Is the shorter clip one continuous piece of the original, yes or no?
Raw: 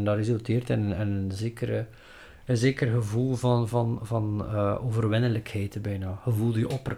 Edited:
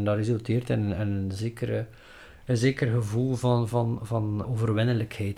no